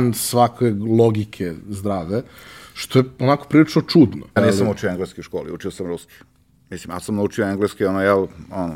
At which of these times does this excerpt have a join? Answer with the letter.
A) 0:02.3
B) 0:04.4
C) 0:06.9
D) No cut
B